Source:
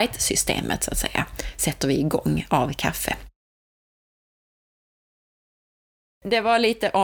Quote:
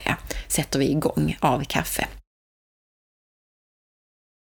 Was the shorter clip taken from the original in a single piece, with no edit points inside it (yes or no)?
yes